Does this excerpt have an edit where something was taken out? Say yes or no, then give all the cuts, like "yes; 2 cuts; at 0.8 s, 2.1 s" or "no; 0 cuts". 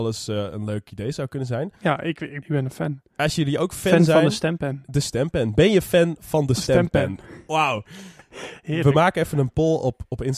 yes; 1 cut; at 2.4 s